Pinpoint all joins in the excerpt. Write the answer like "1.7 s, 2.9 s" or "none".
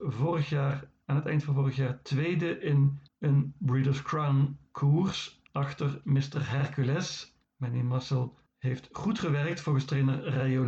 none